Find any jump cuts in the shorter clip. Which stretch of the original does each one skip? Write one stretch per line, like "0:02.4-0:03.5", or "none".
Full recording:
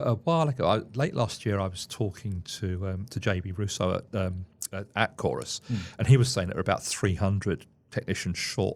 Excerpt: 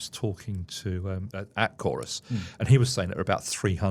0:03.1-0:04.7